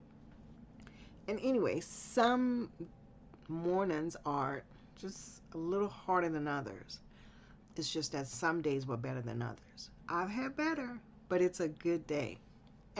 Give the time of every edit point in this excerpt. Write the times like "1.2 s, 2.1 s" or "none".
7.6 s, 10.0 s